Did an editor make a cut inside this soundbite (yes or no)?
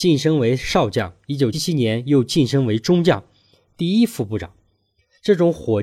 yes